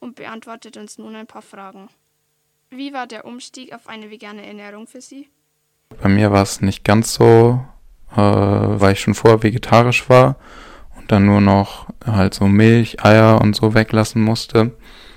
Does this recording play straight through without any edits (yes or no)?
no